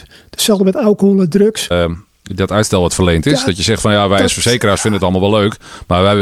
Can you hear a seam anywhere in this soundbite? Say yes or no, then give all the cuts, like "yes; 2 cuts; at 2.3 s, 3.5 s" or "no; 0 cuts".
yes; 1 cut; at 1.7 s